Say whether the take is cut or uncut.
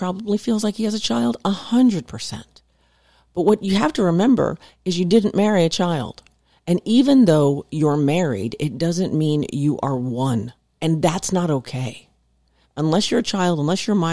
cut